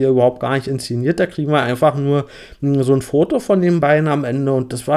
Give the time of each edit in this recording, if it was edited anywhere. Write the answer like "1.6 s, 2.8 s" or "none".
none